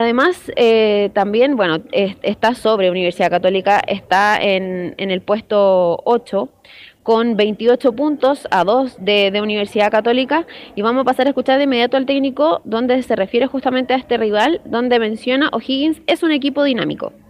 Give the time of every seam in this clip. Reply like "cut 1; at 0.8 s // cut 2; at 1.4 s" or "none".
none